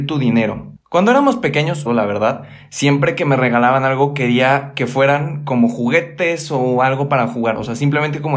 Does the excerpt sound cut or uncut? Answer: cut